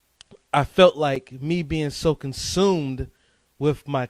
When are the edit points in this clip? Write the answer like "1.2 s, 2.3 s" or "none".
none